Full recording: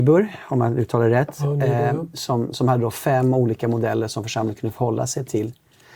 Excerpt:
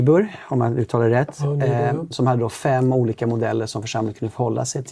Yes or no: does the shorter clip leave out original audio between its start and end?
yes